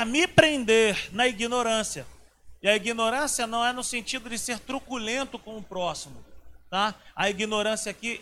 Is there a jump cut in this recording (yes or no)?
no